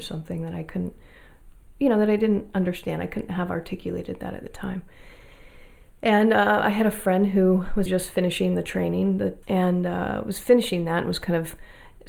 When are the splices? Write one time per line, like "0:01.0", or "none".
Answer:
0:07.9
0:09.4